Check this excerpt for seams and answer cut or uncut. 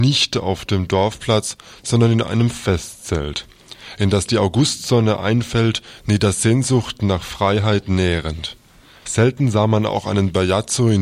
cut